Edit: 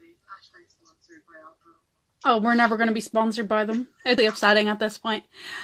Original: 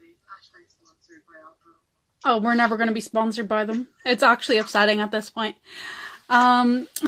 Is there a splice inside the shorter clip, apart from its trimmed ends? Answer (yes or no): yes